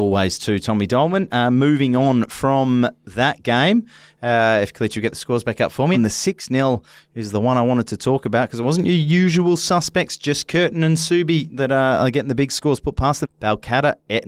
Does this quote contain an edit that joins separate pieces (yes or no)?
yes